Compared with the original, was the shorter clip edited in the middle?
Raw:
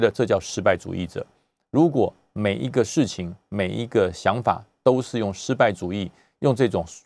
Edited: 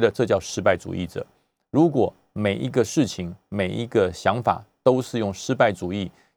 no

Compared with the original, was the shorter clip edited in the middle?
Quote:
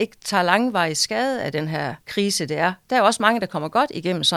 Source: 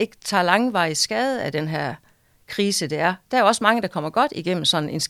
yes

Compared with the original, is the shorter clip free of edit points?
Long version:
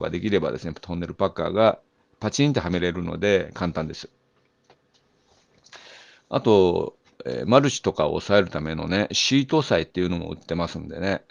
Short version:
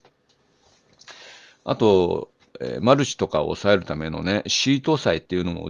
yes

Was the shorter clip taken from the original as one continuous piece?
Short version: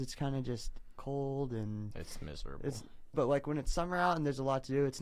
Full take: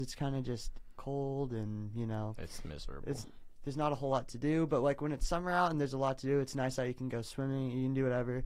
no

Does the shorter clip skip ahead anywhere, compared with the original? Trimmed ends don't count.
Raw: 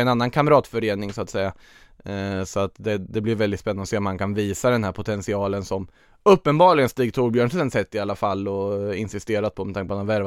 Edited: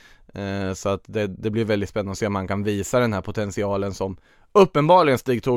no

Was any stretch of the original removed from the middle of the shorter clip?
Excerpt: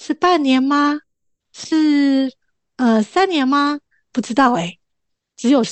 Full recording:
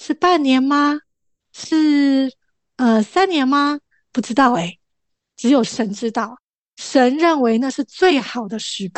no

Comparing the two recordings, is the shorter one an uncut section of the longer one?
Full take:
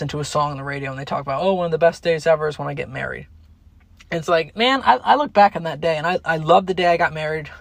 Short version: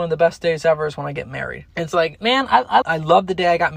no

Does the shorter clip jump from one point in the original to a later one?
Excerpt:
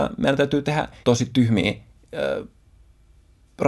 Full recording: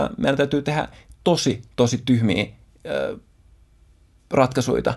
yes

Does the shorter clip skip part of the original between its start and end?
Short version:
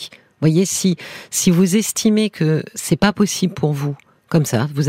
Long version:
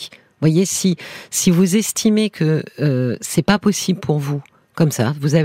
yes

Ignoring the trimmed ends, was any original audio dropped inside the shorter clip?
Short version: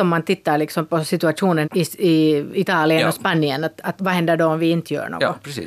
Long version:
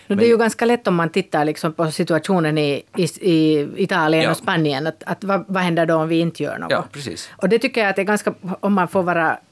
yes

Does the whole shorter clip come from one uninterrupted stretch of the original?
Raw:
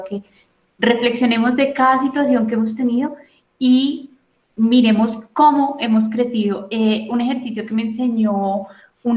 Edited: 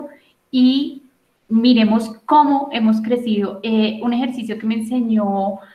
yes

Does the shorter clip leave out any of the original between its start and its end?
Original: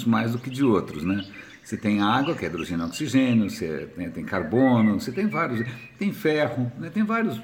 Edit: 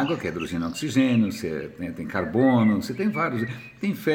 no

